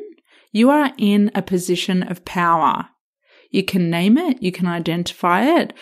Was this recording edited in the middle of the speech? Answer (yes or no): no